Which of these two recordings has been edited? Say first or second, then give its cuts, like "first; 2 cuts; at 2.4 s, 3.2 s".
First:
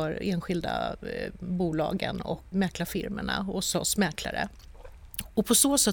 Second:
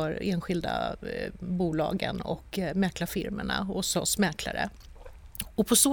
first; 1 cut; at 2.5 s